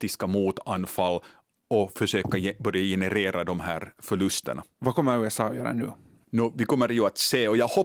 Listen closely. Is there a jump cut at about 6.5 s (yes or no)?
no